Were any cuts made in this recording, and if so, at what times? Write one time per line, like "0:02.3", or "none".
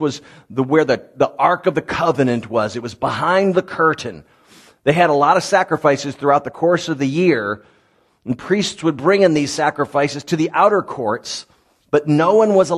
none